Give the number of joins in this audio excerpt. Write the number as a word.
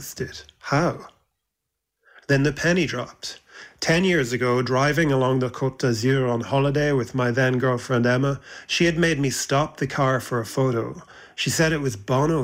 zero